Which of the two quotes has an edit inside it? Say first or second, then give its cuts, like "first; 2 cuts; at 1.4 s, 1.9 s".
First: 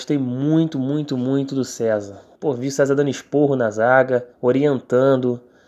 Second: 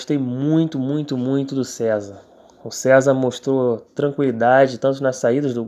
first; 2 cuts; at 2.4 s, 4.3 s